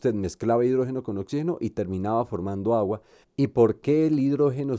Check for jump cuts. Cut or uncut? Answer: cut